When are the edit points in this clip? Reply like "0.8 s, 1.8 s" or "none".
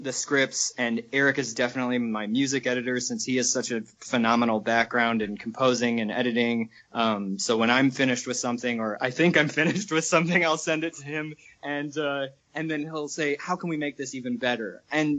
none